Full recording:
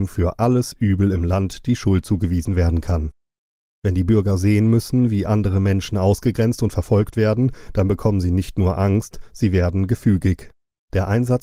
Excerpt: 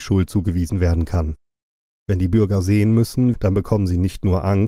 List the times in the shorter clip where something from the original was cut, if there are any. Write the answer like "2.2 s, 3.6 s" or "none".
3.3 s